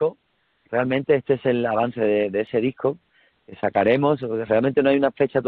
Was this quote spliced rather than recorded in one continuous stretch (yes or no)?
no